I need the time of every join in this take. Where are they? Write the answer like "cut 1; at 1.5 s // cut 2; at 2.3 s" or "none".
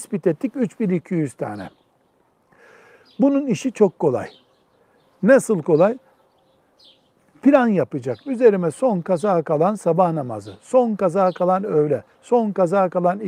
cut 1; at 8.2 s